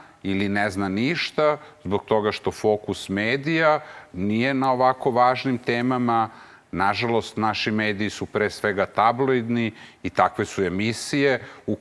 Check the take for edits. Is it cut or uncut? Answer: cut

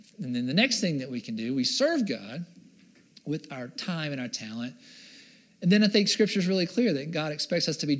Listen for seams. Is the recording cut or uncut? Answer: uncut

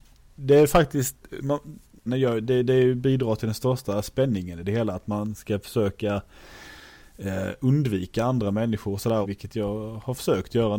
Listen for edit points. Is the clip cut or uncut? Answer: cut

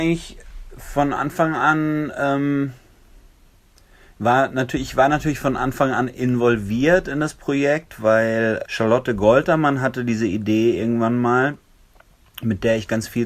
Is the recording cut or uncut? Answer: cut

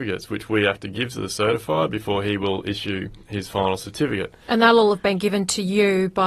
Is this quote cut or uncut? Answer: uncut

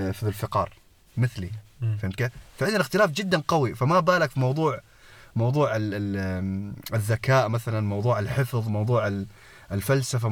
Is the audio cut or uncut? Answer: uncut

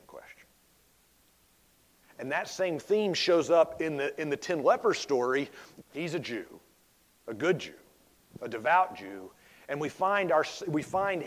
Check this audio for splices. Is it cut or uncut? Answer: cut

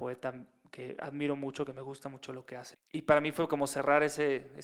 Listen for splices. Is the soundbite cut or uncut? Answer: cut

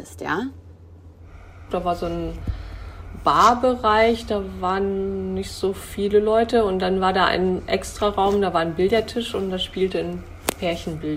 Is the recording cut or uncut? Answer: cut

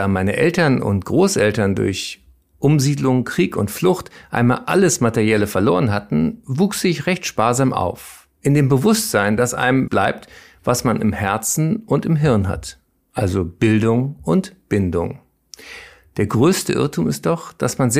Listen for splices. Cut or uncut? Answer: cut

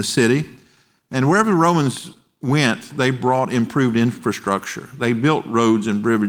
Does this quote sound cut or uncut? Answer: uncut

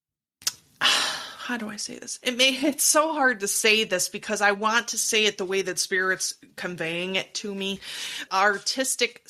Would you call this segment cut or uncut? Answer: cut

